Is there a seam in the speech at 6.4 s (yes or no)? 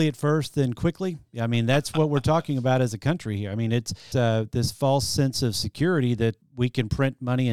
yes